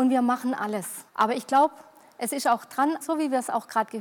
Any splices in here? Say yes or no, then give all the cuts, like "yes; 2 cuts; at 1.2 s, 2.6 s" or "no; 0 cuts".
yes; 2 cuts; at 1.1 s, 3.0 s